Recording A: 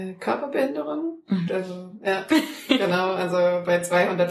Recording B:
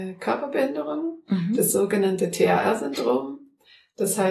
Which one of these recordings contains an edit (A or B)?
A